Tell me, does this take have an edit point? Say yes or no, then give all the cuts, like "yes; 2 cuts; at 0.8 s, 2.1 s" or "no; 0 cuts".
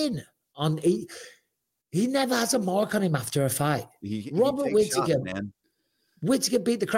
no; 0 cuts